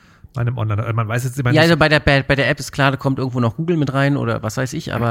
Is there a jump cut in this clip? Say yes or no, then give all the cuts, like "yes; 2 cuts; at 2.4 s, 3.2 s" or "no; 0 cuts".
no; 0 cuts